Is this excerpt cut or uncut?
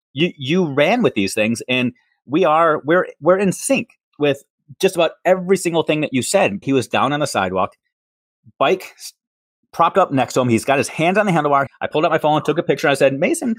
cut